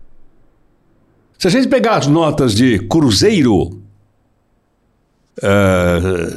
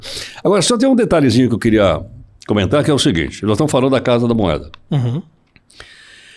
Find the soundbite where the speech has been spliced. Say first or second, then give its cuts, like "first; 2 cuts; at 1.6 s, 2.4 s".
first; 2 cuts; at 1.3 s, 5.3 s